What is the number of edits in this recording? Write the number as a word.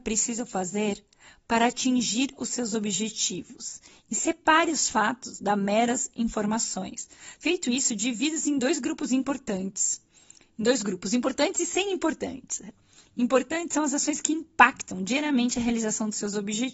one